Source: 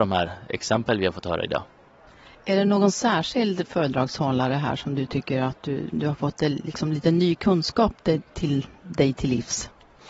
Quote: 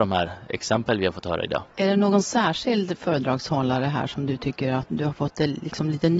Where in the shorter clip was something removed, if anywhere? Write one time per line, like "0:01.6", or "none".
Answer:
0:01.7
0:04.9